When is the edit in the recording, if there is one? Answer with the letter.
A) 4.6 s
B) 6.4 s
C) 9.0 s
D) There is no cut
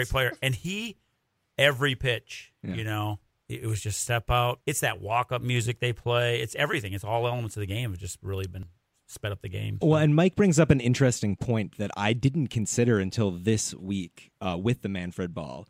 A